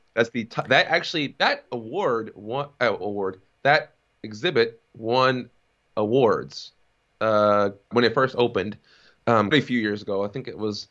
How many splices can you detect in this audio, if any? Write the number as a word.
two